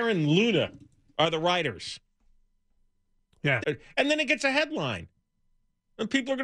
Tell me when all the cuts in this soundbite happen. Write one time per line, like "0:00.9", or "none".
0:03.6

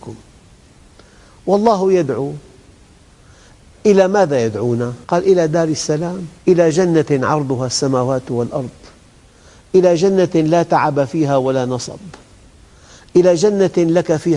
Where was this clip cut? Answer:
0:05.0
0:06.4

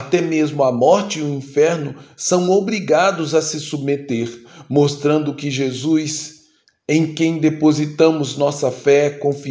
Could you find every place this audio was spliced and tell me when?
none

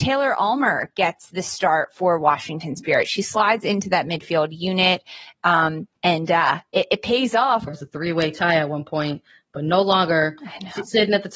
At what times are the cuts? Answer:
0:06.0
0:07.7

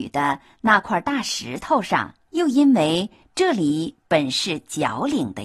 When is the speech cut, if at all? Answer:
0:02.3

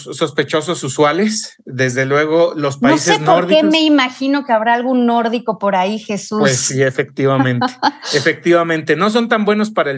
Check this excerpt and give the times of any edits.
none

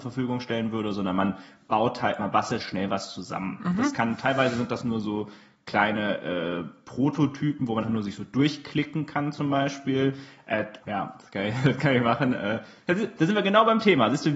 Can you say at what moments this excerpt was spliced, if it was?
0:02.6
0:07.8
0:10.8

